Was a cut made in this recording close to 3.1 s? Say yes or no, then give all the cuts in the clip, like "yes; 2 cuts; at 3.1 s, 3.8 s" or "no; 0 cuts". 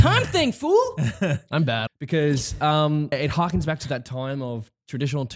yes; 2 cuts; at 1.9 s, 3.1 s